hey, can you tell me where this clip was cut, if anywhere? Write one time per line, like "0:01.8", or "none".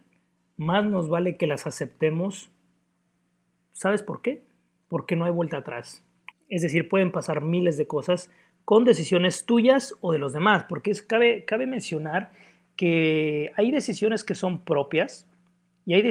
0:06.3